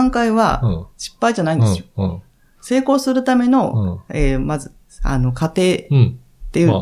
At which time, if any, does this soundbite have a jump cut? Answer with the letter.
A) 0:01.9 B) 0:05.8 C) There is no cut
C